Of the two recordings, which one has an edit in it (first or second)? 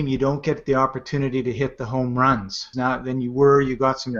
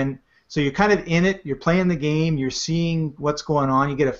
first